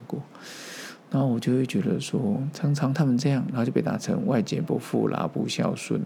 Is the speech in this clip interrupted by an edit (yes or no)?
no